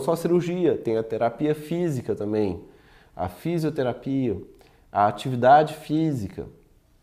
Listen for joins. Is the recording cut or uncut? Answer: uncut